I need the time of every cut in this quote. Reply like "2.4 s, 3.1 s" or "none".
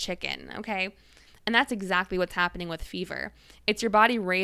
1.3 s